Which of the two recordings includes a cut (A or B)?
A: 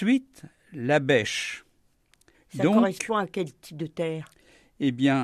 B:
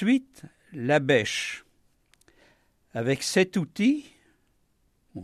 A